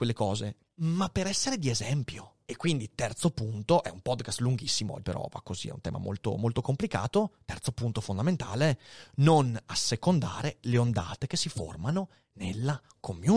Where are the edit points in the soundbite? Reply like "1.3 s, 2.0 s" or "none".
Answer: 2.5 s, 5.0 s